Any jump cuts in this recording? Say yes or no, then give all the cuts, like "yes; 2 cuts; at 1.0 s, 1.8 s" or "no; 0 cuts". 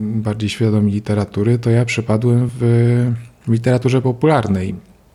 no; 0 cuts